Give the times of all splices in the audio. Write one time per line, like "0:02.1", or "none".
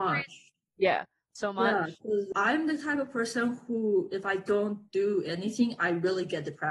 0:02.3